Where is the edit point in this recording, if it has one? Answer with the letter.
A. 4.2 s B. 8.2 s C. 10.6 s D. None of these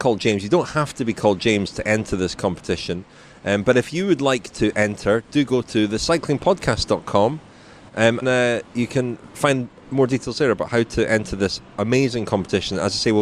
B